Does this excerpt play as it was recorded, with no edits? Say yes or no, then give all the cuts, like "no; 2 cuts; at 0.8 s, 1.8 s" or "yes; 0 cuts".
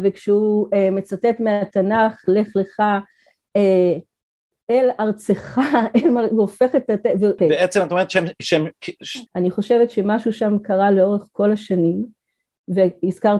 no; 2 cuts; at 7.4 s, 9.3 s